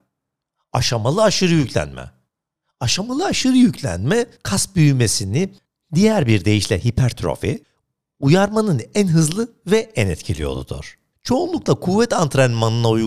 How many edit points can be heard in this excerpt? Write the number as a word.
zero